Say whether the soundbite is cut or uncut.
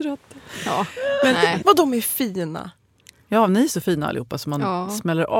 cut